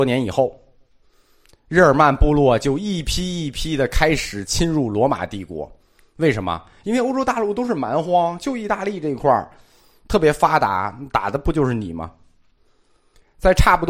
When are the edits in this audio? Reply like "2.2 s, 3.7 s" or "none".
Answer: none